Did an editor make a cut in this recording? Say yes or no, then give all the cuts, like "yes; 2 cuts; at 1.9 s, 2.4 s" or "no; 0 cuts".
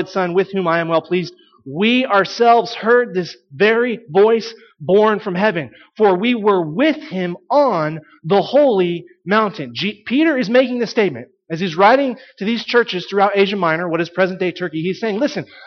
no; 0 cuts